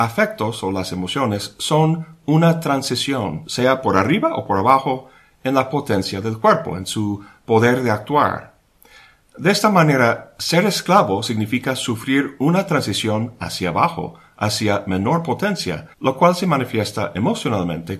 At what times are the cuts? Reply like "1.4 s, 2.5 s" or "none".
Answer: 15.9 s